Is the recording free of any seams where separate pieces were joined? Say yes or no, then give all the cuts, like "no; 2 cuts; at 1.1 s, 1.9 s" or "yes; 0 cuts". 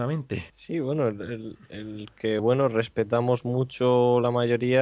yes; 0 cuts